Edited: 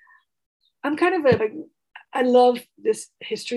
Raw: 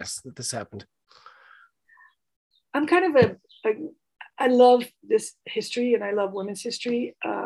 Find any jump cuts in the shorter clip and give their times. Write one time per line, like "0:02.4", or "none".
0:01.4

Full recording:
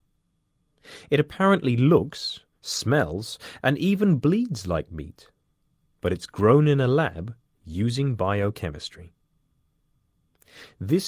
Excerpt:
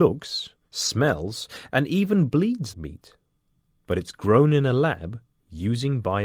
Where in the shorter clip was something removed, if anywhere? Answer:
0:02.7

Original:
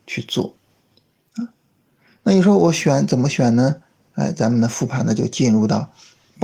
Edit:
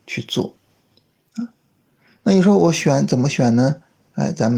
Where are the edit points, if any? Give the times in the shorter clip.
none

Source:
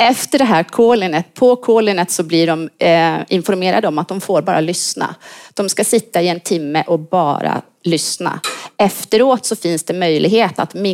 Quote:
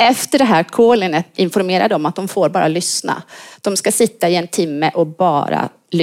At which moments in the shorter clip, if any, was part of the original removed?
0:01.3

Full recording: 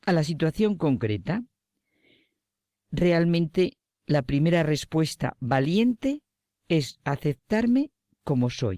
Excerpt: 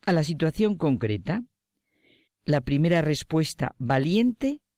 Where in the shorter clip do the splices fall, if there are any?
0:02.3

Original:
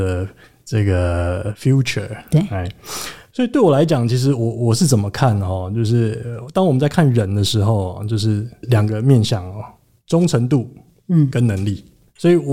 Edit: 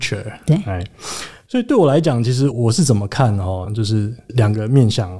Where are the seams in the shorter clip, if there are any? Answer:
0:02.5
0:03.7

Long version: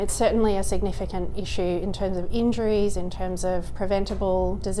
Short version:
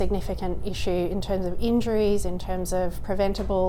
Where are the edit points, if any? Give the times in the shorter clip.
none

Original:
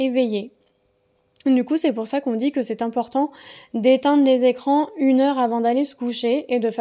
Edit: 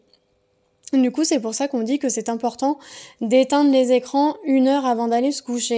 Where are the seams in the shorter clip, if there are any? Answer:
none

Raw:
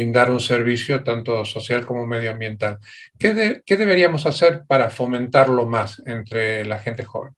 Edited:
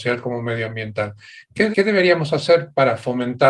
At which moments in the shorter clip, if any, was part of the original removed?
0:01.7

